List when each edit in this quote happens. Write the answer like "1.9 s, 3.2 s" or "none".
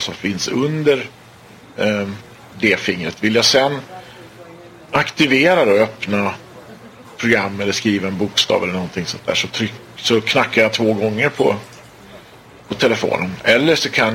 none